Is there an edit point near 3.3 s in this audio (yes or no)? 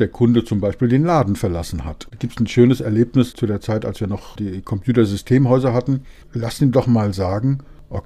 yes